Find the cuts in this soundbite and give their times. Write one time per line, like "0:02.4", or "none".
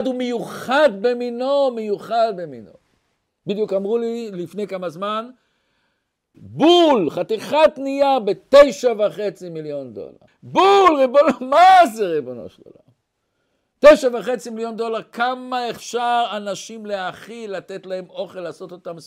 0:06.3
0:10.3